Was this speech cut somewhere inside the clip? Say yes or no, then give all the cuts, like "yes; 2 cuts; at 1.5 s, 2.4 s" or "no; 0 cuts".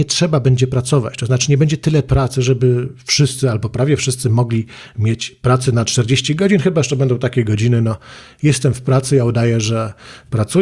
no; 0 cuts